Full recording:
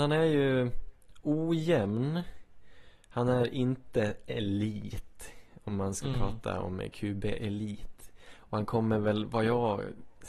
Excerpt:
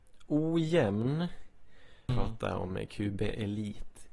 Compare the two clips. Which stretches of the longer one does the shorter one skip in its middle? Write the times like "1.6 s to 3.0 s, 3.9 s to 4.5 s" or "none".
3.0 s to 6.1 s